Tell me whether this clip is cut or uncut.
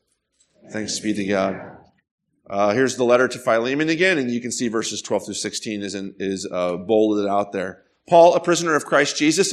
cut